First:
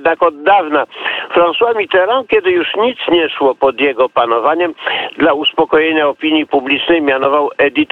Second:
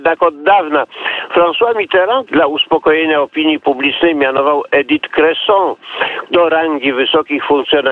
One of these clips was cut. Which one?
second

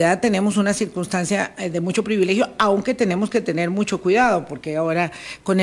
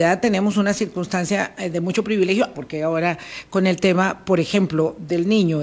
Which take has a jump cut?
second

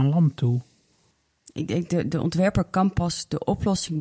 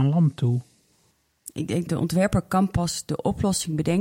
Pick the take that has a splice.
second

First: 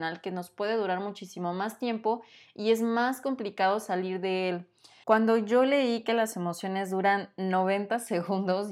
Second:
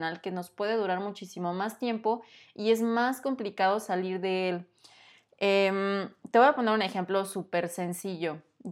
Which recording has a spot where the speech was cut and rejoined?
first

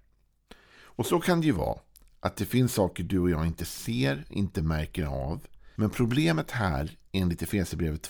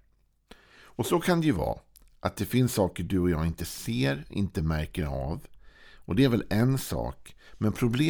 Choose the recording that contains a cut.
first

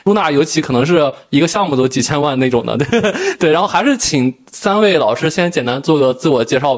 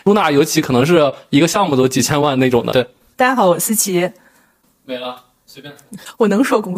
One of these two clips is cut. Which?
second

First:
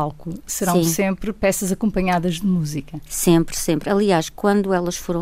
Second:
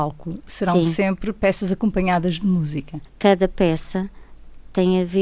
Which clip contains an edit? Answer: second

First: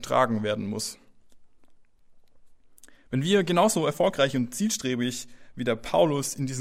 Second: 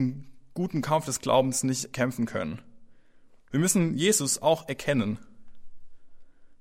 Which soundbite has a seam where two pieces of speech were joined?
second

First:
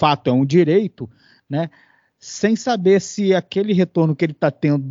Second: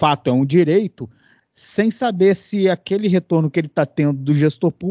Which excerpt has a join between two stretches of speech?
second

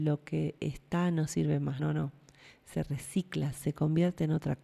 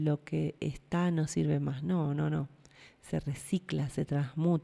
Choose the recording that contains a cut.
first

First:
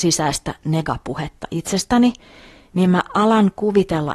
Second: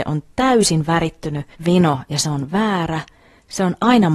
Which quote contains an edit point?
second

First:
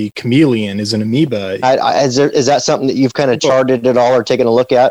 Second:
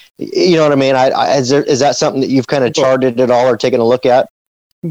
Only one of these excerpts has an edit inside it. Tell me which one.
first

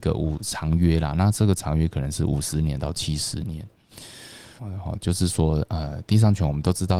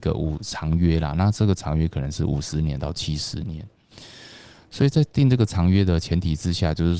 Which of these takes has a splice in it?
first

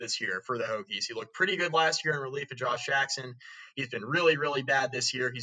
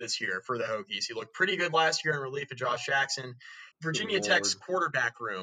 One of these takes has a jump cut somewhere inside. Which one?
second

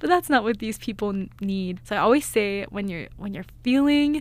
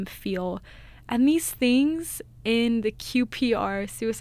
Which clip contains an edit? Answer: first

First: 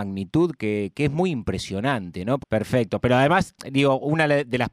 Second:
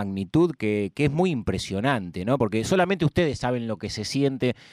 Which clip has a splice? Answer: first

